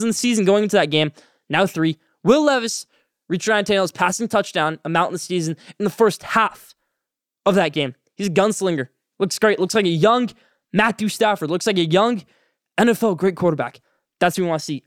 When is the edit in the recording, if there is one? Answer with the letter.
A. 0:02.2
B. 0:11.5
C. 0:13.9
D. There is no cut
D